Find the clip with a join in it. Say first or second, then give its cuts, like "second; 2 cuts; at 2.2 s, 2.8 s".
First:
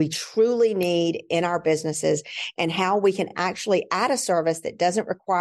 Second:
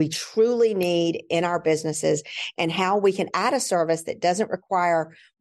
second; 1 cut; at 3.3 s